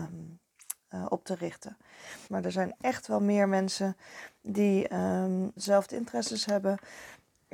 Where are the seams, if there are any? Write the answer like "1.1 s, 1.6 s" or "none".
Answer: 2.3 s, 5.6 s